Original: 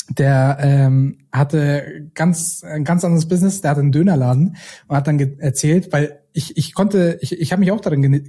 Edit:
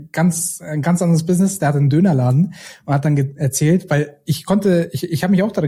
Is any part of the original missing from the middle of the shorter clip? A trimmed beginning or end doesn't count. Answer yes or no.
yes